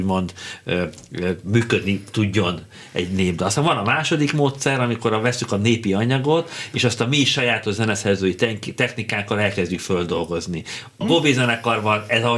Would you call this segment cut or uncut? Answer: cut